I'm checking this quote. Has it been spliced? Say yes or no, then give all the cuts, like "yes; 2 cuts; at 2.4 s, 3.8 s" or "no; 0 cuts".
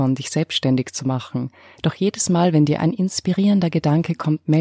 no; 0 cuts